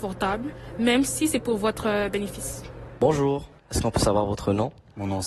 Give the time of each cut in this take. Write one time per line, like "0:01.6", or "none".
0:03.6